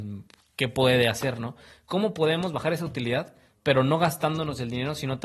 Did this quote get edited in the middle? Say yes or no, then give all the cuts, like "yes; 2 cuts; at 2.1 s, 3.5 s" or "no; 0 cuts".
no; 0 cuts